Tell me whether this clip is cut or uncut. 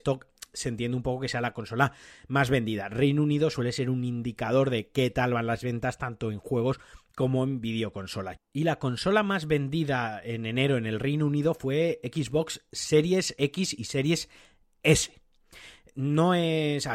cut